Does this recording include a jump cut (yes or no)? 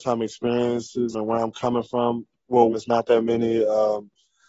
yes